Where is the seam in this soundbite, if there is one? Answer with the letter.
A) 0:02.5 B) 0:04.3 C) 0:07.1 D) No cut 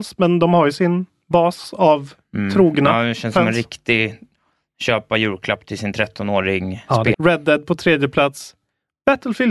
C